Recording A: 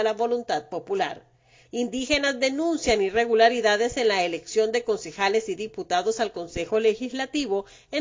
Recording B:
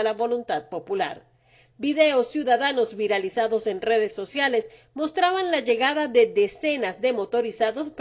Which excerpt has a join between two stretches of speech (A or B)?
A